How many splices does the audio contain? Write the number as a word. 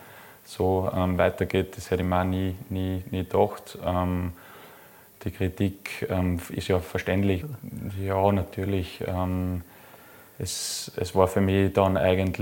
one